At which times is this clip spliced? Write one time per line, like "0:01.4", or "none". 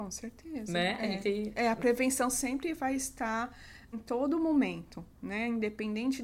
0:03.9